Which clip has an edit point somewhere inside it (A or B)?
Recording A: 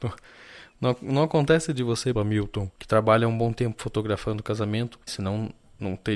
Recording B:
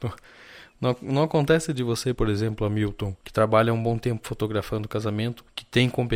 A